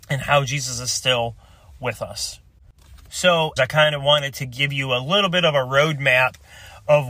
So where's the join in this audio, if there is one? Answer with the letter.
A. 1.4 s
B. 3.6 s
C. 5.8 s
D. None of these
B